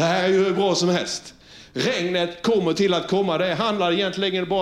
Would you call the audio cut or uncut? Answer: uncut